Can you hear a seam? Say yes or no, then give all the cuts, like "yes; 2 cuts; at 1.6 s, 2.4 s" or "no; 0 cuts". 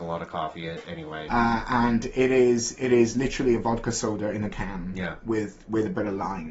yes; 1 cut; at 1.3 s